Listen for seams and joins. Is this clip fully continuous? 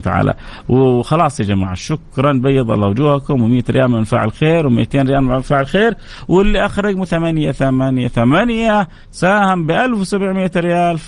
no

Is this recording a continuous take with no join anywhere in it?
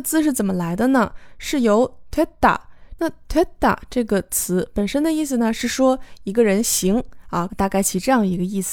no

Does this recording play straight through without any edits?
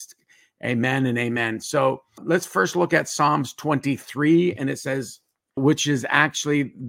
no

